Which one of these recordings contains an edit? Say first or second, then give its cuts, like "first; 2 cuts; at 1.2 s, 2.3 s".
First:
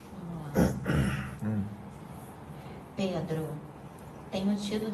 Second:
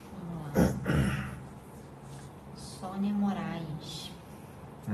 first; 1 cut; at 1.4 s